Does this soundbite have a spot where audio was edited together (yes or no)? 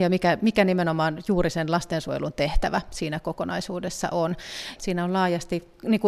yes